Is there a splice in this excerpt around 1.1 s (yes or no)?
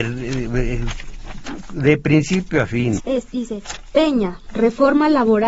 no